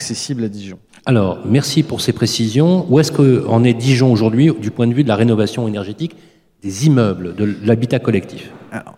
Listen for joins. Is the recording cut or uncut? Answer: uncut